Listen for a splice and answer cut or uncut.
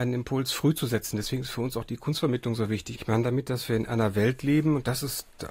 cut